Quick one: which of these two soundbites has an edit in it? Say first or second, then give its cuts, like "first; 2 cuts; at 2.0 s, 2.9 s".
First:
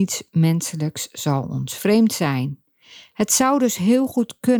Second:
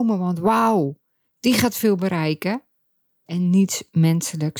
second; 1 cut; at 3.3 s